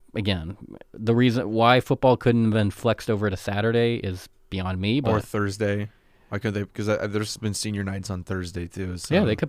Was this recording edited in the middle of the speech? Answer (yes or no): no